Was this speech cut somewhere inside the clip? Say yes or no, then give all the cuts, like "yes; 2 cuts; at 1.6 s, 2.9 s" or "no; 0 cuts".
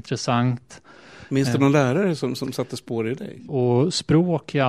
yes; 1 cut; at 3.5 s